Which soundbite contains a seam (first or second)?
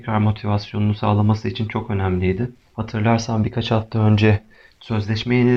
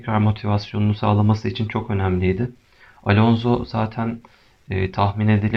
first